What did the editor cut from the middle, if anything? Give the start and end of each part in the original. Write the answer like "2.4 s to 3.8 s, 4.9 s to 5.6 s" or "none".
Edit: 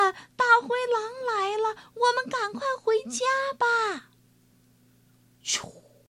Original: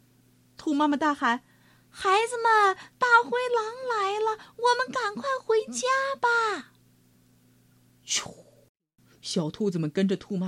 none